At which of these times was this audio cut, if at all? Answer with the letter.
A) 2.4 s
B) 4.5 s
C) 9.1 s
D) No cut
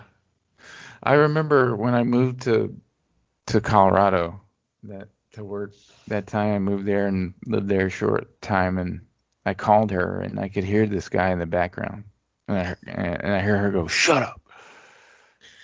D